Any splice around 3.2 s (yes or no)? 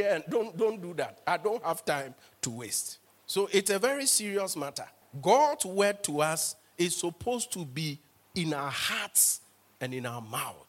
no